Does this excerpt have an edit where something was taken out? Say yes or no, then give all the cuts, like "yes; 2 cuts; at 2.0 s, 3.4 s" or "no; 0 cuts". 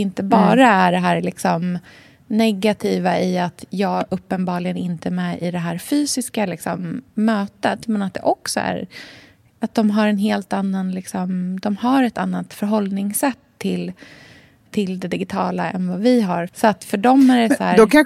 yes; 2 cuts; at 14.7 s, 16.5 s